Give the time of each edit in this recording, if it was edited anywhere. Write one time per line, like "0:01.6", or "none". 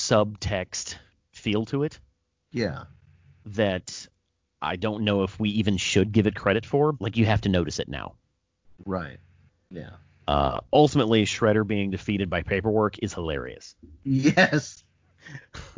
0:06.9